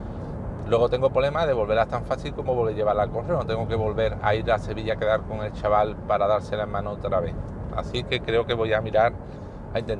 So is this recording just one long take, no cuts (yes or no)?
yes